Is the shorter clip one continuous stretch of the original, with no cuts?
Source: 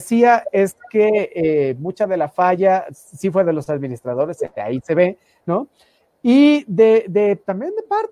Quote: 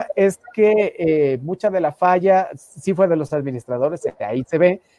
yes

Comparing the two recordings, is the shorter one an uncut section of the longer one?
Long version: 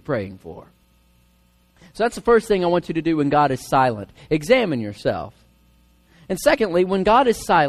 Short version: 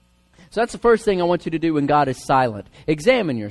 yes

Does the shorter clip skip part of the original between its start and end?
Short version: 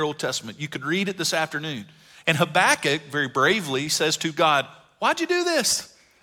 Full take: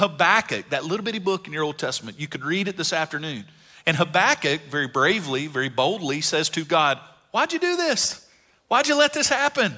yes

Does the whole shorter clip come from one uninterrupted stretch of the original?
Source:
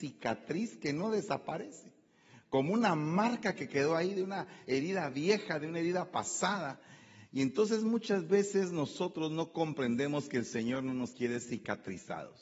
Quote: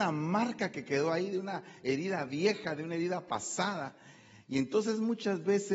yes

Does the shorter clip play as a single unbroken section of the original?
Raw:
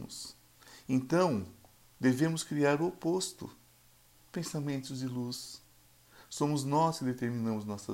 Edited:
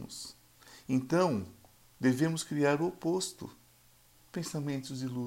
yes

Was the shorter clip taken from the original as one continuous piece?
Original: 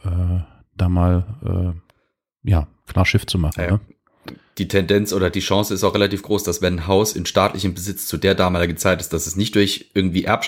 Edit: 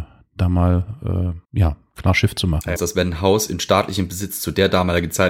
no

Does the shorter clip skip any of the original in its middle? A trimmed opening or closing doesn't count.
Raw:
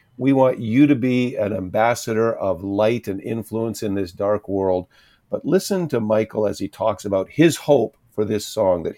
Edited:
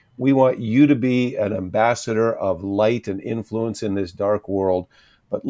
no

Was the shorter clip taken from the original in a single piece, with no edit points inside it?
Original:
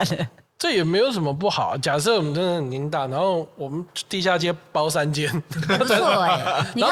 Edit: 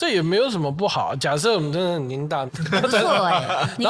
no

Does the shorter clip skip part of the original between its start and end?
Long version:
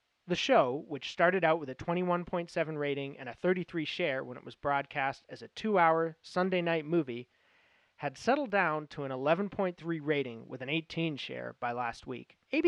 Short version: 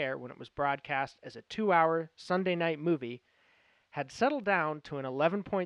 no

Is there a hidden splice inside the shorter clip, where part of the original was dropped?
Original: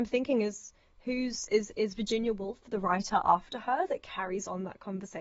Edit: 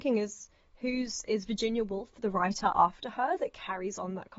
yes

